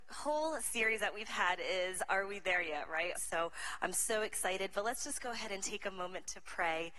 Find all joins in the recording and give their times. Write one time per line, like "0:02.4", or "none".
0:03.2

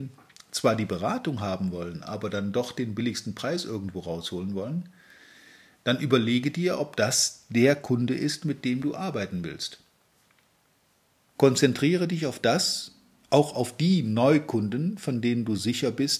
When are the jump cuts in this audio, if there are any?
0:11.3

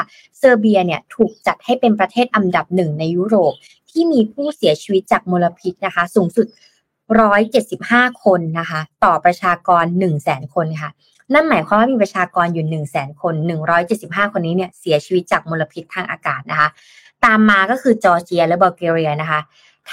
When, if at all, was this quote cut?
none

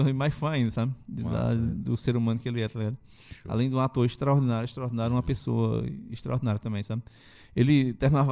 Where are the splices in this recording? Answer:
none

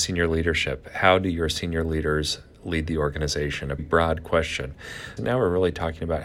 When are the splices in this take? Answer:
0:03.8
0:05.2

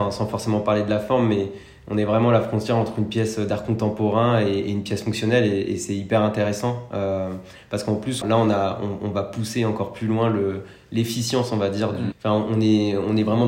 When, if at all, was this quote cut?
0:08.2
0:12.1

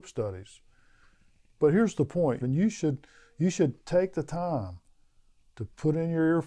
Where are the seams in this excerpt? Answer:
0:02.4

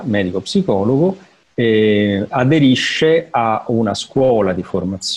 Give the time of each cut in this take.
none

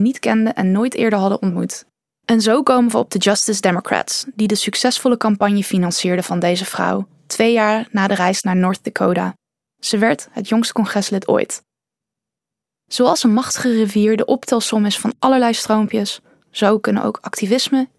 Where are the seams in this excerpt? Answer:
0:02.1

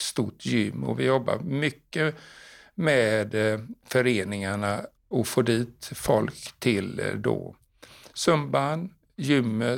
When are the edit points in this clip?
0:05.0

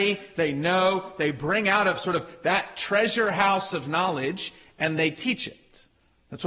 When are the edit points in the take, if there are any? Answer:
none

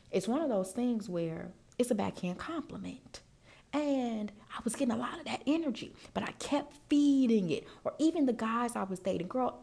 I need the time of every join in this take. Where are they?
none

